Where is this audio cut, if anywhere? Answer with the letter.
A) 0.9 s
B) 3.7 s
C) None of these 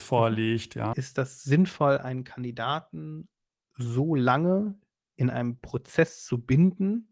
A